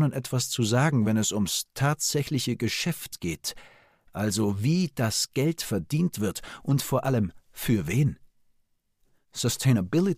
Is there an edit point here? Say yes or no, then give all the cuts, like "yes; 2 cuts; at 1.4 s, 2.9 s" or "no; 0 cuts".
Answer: no; 0 cuts